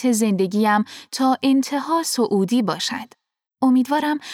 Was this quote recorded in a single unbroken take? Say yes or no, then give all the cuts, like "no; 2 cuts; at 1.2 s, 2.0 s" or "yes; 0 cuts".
no; 1 cut; at 3.4 s